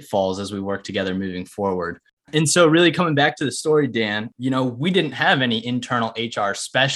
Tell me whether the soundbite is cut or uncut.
cut